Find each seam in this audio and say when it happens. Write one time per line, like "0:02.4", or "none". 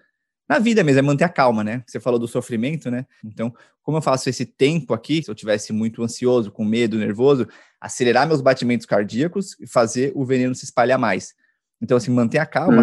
0:03.2
0:05.2

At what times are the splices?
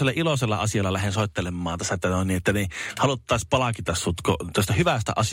none

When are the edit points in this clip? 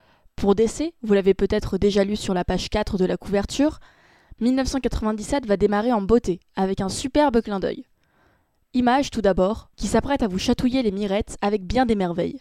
0:08.6
0:09.7

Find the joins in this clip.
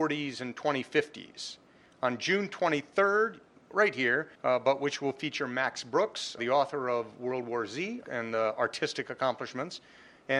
0:04.3
0:06.4
0:08.0

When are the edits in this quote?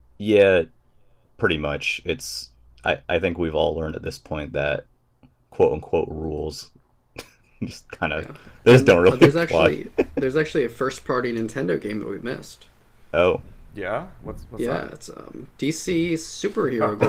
none

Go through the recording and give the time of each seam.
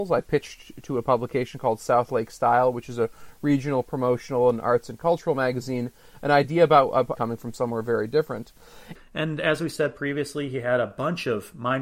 0:07.2
0:09.0

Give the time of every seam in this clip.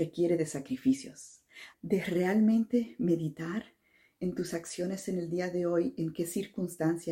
0:01.7

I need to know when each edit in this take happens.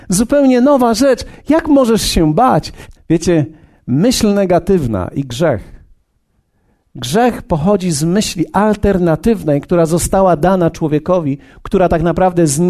0:02.9

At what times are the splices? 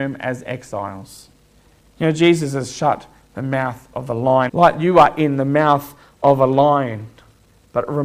0:01.8
0:04.5

